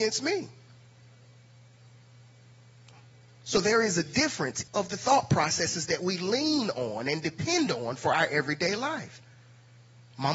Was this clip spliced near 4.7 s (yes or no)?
yes